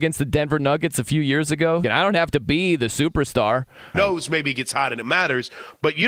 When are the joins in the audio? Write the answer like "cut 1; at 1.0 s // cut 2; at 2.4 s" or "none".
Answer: cut 1; at 1.8 s // cut 2; at 3.9 s